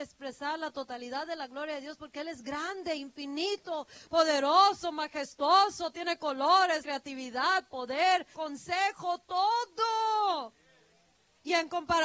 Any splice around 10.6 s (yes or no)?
no